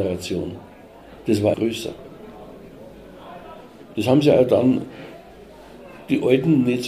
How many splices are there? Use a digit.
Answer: 1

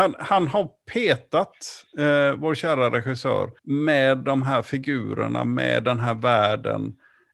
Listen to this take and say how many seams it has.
1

